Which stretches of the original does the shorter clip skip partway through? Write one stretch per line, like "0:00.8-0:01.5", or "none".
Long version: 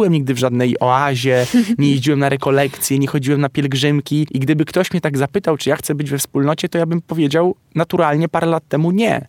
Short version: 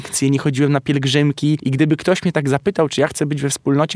none